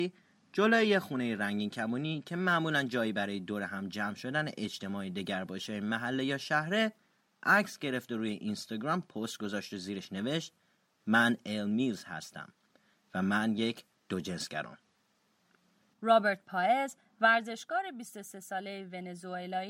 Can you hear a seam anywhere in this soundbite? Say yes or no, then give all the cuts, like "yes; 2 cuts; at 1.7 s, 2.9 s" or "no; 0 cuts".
yes; 1 cut; at 15.9 s